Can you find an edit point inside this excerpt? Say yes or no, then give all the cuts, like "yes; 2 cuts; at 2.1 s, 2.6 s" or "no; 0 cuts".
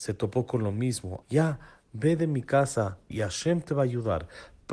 yes; 2 cuts; at 1.2 s, 3.1 s